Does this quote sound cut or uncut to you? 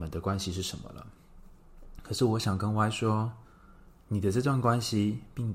uncut